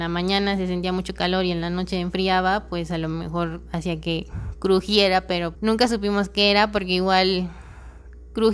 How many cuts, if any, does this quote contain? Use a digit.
1